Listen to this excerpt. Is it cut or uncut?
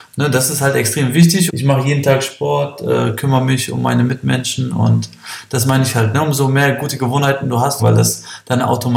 cut